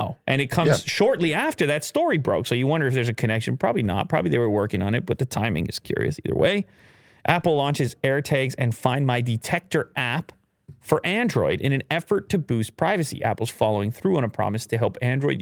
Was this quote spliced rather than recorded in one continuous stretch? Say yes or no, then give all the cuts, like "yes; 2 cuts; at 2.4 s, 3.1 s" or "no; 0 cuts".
no; 0 cuts